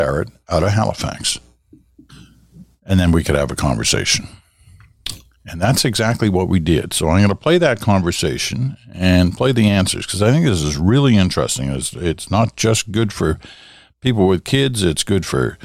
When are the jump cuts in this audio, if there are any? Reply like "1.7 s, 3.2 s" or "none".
2.8 s